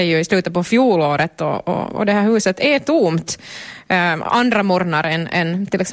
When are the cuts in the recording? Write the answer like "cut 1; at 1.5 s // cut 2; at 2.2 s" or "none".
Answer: none